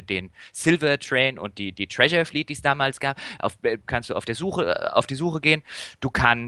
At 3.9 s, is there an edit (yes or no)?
yes